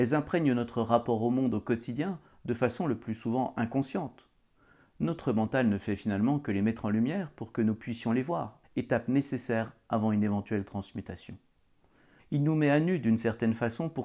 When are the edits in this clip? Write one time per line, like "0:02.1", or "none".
0:08.6
0:12.2